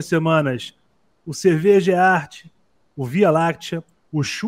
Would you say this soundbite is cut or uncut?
uncut